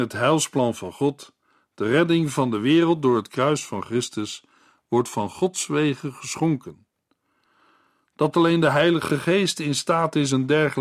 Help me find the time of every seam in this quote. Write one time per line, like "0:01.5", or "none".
none